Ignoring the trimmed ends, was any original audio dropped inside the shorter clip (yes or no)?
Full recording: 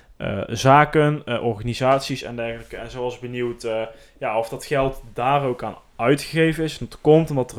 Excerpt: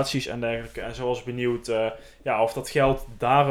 no